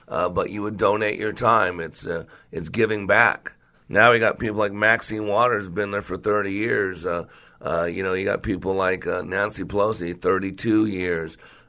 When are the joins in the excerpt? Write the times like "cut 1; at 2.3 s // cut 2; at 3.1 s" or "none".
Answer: cut 1; at 3.7 s

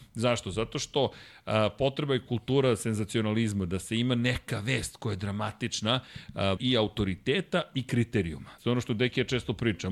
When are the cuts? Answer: cut 1; at 6.6 s // cut 2; at 8.6 s

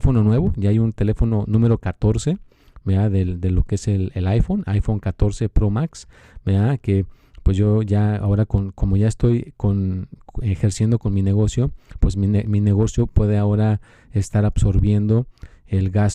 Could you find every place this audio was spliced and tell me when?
none

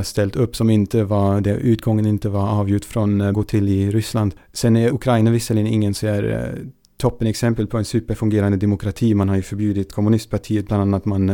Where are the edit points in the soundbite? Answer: cut 1; at 3.3 s // cut 2; at 4.9 s

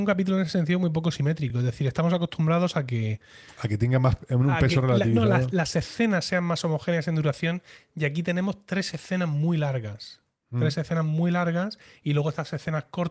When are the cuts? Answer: none

